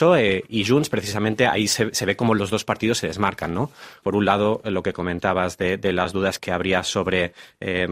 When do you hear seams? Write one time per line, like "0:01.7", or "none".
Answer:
0:04.0
0:06.4